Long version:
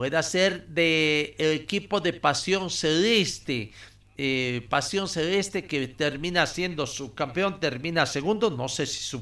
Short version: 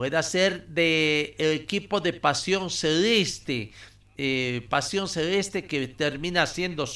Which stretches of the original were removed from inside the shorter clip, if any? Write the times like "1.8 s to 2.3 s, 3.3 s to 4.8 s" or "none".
none